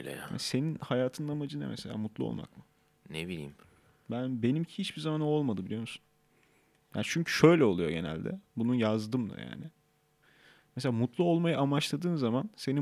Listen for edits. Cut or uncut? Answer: uncut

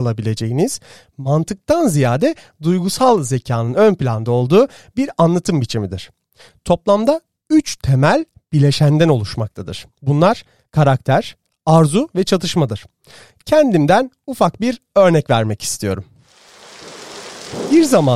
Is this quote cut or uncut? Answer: uncut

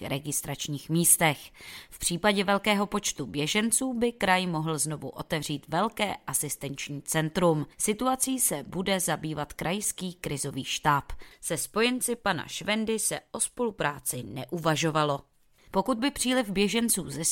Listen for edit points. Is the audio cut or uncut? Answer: cut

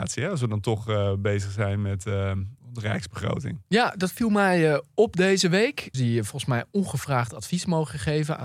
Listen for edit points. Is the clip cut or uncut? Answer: cut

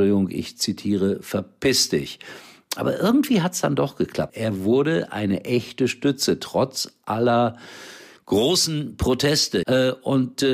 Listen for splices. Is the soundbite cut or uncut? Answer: cut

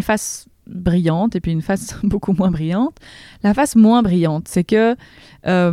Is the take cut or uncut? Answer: uncut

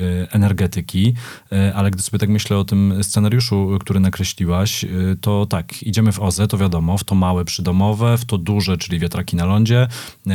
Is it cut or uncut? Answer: uncut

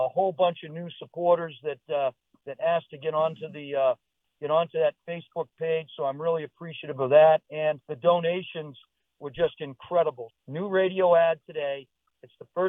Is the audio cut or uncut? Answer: cut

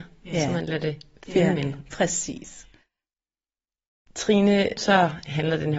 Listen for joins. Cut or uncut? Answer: cut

